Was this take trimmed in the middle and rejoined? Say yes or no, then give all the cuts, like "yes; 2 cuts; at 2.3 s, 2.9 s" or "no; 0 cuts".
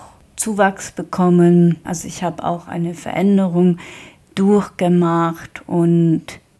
yes; 1 cut; at 1.8 s